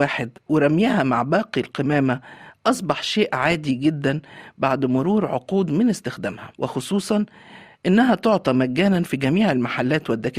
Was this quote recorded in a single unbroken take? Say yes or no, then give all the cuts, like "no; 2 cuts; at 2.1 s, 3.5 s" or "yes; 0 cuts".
no; 1 cut; at 6.5 s